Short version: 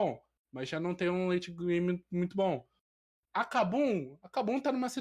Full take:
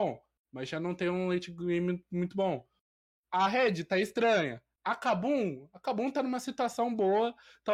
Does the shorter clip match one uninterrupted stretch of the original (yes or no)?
no